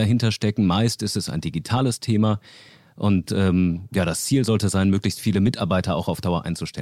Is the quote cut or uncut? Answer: uncut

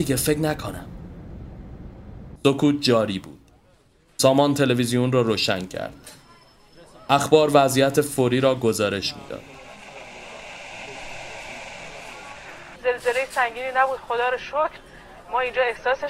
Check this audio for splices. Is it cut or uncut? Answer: cut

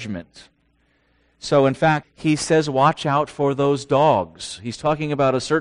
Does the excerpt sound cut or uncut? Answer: cut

